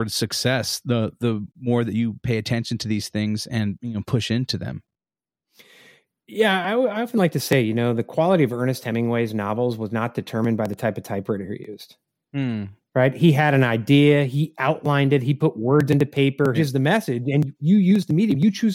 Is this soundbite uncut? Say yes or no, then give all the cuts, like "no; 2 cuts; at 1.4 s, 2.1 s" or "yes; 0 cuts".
no; 1 cut; at 16.5 s